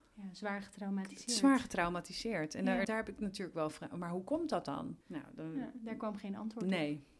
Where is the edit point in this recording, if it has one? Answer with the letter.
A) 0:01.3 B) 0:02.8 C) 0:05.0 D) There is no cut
B